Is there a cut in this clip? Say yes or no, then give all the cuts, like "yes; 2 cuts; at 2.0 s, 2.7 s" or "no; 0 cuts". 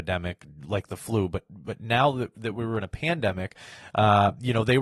no; 0 cuts